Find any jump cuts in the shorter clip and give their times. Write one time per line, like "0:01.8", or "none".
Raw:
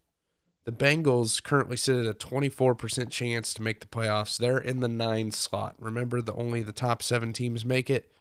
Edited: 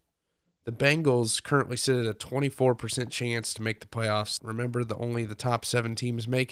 0:04.4